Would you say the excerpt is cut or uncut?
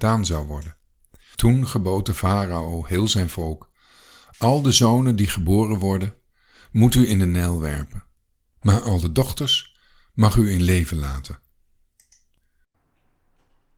cut